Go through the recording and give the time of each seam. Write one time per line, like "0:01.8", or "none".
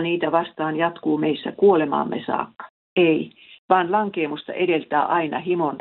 0:02.9